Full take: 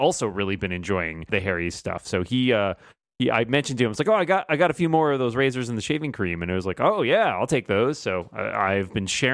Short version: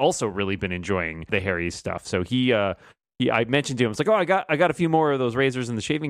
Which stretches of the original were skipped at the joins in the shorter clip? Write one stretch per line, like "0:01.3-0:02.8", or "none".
none